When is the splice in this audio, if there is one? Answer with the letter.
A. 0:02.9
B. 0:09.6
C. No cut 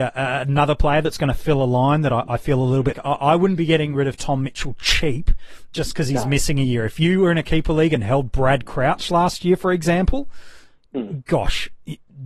A